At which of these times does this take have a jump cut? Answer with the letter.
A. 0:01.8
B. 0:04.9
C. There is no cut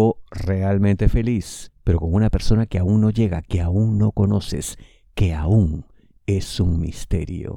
C